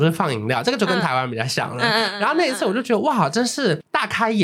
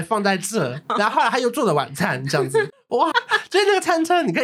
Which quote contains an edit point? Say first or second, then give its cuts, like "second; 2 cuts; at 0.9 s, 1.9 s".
second; 1 cut; at 3.1 s